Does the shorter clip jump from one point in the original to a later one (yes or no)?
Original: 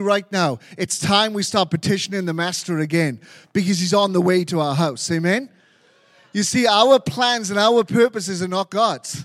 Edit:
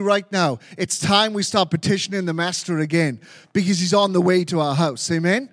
no